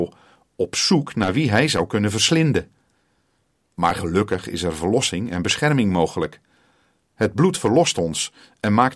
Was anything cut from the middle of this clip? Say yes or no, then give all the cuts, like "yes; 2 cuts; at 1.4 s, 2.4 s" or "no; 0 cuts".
no; 0 cuts